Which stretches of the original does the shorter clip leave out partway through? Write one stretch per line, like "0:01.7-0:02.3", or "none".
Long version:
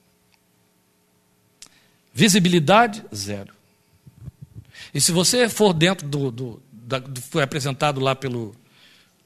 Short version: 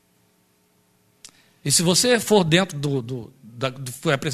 0:02.0-0:04.9